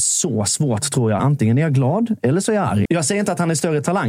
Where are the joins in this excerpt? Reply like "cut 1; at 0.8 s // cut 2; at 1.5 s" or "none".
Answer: cut 1; at 1.2 s // cut 2; at 2.9 s

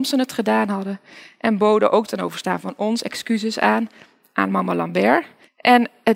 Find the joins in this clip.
none

